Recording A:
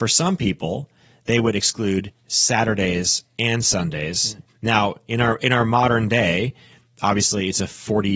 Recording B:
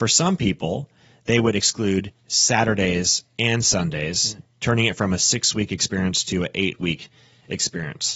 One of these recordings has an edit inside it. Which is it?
A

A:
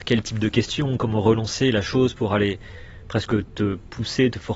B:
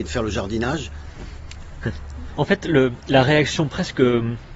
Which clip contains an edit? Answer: B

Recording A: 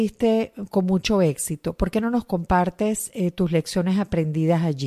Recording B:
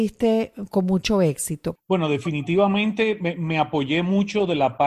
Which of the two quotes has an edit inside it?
B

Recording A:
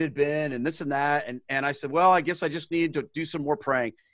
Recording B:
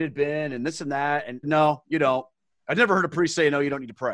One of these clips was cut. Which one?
B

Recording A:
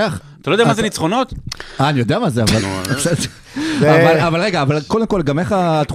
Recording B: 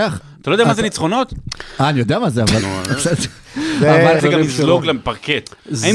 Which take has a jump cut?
B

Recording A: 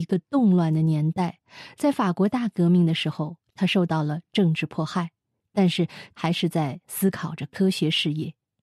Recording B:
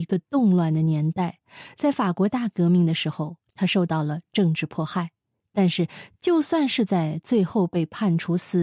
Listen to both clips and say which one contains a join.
A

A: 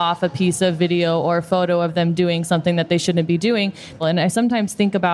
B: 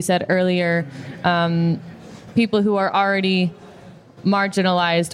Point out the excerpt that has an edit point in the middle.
A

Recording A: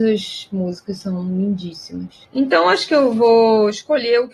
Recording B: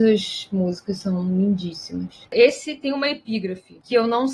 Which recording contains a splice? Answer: B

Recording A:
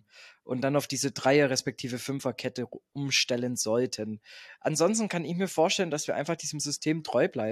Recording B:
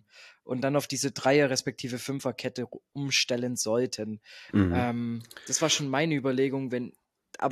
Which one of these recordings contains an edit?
B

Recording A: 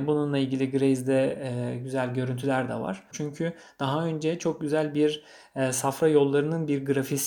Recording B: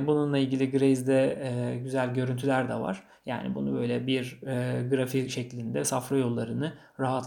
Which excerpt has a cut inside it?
A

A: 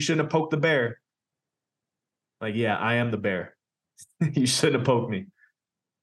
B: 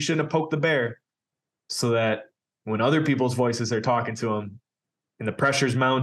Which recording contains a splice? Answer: B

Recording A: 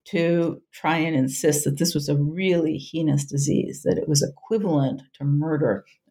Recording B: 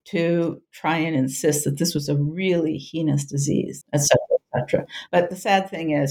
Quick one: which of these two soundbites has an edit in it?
B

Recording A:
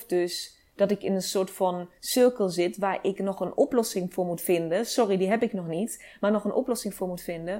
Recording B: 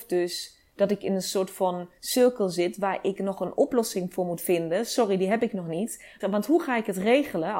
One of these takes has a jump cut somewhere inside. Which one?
B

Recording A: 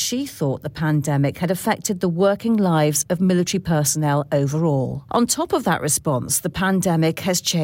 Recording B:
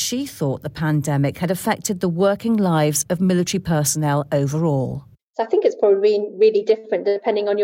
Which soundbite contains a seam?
A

